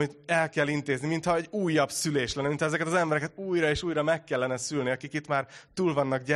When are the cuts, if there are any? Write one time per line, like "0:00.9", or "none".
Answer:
none